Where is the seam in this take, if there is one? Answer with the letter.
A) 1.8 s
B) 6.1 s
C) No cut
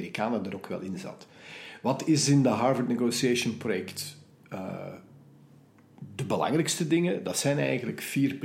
C